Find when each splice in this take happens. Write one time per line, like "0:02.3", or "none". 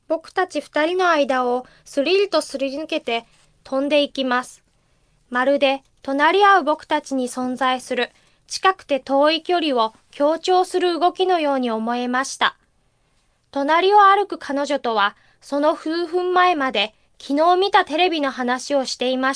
none